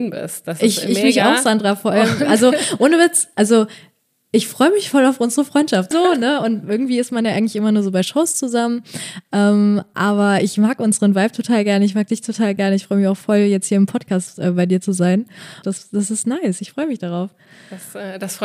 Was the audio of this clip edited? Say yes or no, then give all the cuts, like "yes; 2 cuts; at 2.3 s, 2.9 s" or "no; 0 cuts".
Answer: yes; 2 cuts; at 5.9 s, 15.6 s